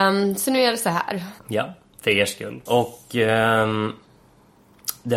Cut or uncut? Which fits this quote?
cut